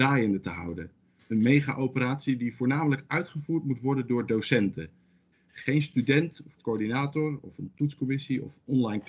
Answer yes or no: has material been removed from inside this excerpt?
yes